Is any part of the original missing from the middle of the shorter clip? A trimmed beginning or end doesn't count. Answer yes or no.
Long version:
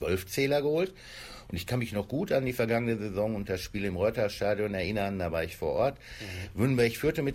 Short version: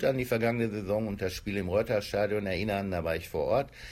no